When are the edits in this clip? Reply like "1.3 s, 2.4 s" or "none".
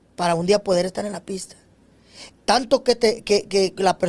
2.3 s